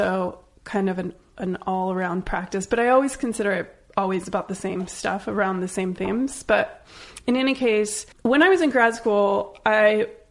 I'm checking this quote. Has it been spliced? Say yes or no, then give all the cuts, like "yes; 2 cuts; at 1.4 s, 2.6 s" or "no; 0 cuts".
yes; 1 cut; at 8.1 s